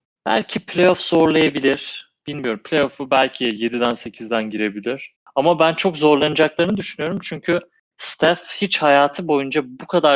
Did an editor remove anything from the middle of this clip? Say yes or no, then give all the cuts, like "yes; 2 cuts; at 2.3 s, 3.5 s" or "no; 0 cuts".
no; 0 cuts